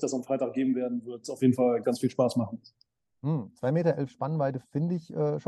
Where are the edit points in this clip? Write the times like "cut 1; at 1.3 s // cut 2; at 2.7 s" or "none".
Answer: cut 1; at 1.8 s